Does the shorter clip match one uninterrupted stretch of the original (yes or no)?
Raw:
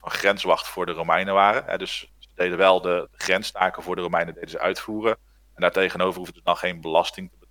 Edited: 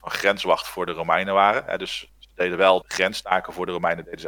no